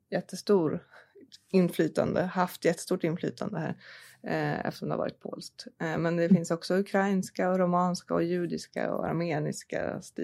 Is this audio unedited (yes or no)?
yes